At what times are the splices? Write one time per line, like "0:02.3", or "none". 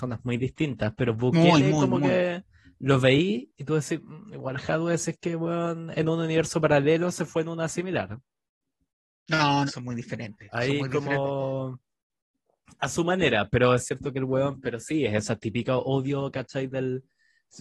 0:09.7